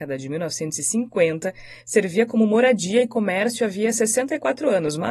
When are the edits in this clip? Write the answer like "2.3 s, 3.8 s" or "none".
none